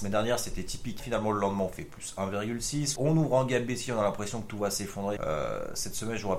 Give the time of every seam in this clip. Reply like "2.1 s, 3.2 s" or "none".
1.0 s, 3.0 s, 5.2 s